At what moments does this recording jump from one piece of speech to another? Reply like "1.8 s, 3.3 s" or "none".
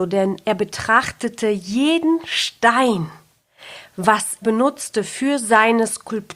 4.4 s